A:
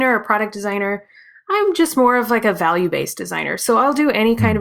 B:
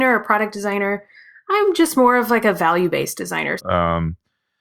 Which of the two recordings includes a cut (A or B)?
B